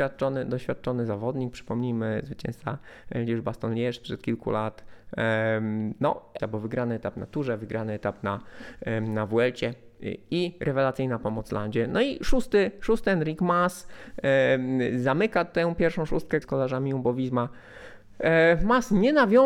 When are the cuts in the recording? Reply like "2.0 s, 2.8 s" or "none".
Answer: 6.4 s, 16.4 s